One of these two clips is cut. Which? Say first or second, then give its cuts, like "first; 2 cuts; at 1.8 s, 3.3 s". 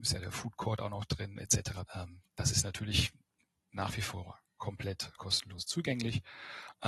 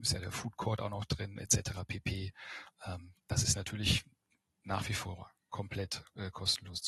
first; 2 cuts; at 1.9 s, 5.2 s